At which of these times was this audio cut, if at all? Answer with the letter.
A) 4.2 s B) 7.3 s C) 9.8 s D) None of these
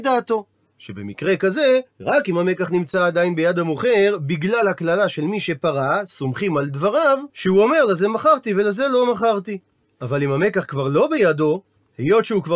B